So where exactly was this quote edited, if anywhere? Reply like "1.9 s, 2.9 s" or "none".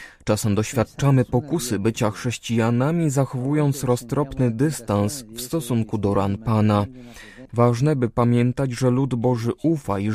7.5 s